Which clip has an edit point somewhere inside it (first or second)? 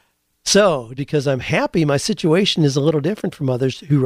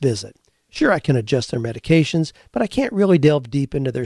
first